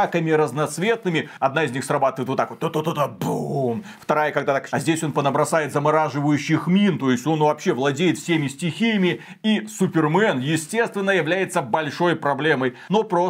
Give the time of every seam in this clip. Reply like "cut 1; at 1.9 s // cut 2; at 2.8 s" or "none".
cut 1; at 4.7 s